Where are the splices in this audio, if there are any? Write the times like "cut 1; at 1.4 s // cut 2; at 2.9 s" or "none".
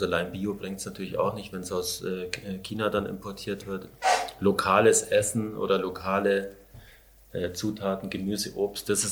none